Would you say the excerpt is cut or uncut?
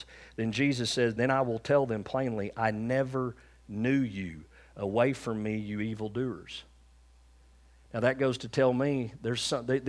uncut